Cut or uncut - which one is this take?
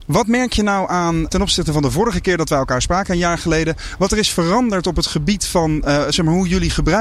cut